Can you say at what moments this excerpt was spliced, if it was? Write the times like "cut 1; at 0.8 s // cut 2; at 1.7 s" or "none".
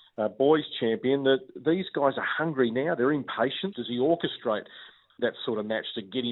cut 1; at 3.7 s